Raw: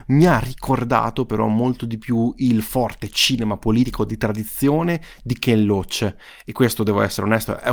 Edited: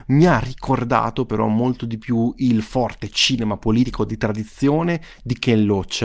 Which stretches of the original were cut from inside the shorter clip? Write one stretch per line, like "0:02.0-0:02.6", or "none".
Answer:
none